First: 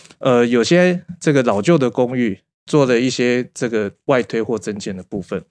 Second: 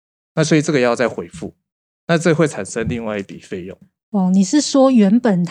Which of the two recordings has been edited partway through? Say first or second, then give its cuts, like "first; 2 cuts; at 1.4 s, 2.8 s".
first; 1 cut; at 2.5 s